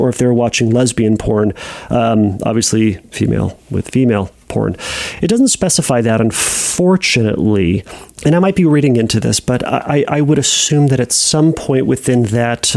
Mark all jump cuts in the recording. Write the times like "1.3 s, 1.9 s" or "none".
none

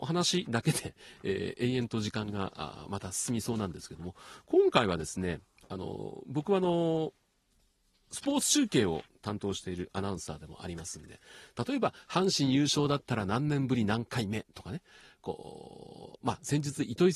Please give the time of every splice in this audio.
none

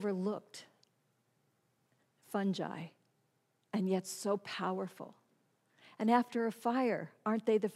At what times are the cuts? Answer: none

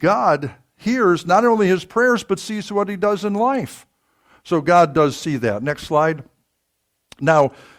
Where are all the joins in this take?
none

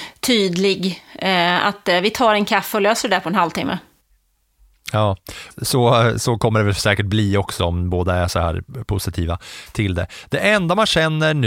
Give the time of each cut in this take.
5.5 s

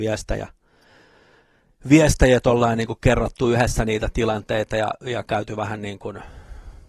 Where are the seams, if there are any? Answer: none

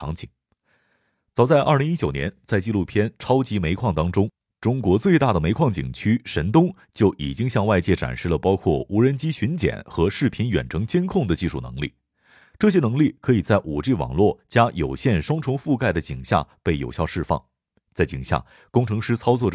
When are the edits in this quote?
none

